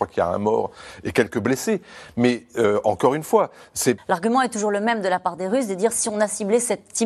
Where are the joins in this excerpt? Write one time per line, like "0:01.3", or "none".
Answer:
0:04.0